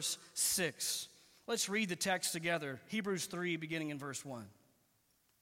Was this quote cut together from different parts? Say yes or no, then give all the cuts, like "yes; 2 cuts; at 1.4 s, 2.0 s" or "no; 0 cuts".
no; 0 cuts